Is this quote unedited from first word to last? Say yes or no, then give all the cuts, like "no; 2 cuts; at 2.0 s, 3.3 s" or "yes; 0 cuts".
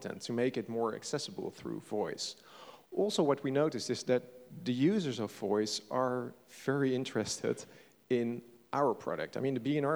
yes; 0 cuts